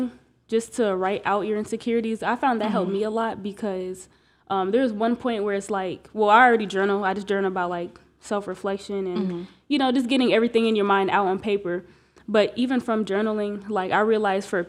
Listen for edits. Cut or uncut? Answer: uncut